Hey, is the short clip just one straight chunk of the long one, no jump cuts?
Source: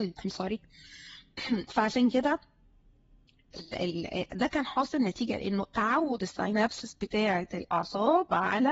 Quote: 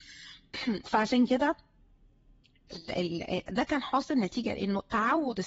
yes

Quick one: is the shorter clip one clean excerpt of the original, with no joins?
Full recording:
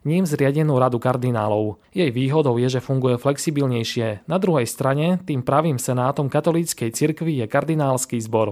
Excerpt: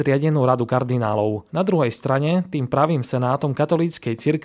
no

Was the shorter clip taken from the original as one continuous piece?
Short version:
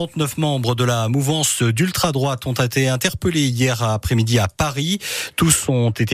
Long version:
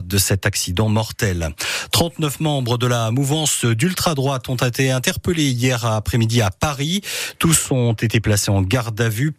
yes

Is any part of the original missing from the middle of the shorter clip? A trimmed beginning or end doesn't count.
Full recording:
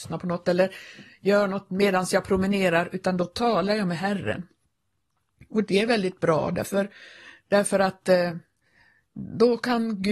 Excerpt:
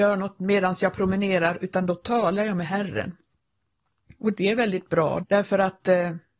yes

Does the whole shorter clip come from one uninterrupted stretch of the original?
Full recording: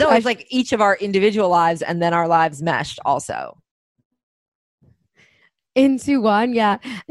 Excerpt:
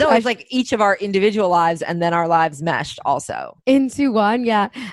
no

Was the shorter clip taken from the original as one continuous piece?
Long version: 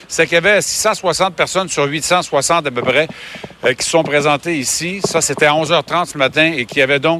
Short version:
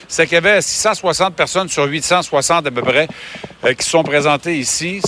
yes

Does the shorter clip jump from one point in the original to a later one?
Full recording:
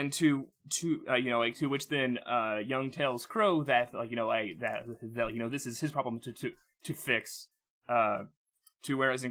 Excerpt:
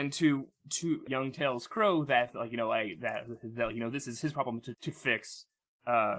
yes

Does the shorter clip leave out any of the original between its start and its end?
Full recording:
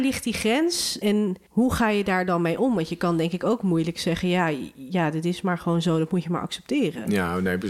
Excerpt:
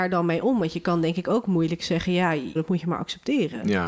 yes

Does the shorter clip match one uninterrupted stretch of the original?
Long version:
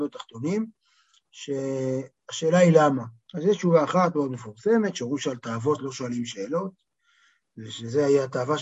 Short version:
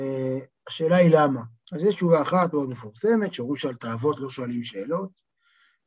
yes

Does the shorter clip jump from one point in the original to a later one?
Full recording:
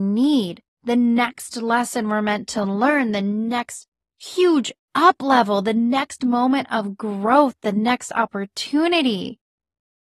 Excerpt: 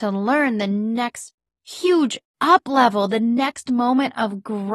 no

